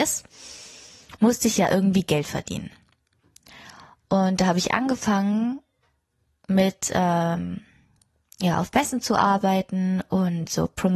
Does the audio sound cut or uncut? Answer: uncut